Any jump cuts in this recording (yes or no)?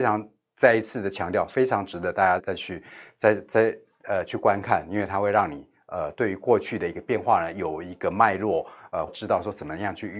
yes